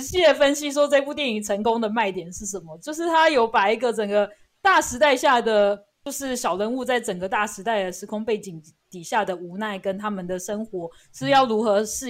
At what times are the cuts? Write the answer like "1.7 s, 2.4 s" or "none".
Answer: none